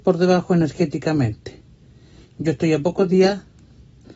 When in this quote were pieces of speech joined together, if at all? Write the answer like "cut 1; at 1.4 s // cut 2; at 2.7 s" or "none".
none

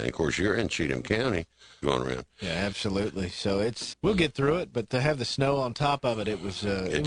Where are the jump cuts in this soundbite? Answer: cut 1; at 1.8 s // cut 2; at 3.9 s

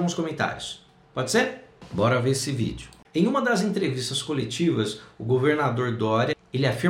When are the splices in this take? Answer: cut 1; at 3.0 s

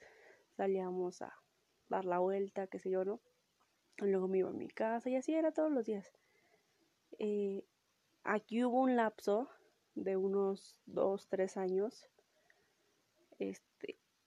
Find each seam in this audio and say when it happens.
none

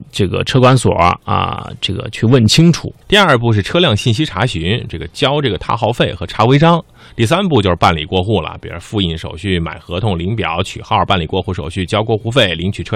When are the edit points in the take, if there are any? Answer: cut 1; at 3.0 s

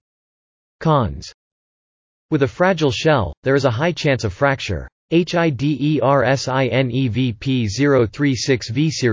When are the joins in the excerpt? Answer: cut 1; at 5.0 s

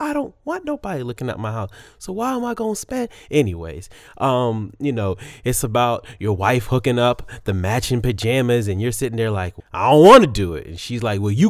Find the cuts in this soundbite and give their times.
none

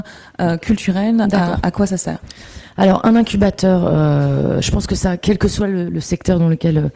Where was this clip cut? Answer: none

